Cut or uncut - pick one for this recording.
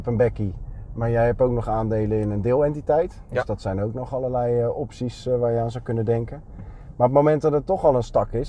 uncut